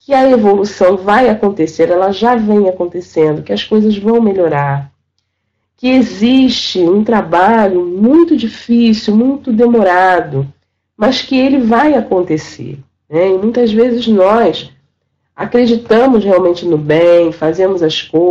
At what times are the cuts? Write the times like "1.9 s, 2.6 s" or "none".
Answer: none